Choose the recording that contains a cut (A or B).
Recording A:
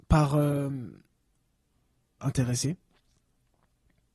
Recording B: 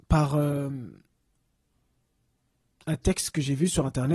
A